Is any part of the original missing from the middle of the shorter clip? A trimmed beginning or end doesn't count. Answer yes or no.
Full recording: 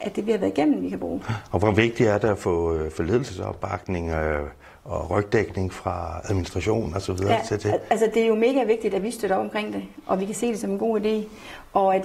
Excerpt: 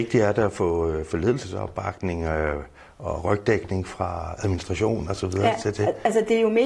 no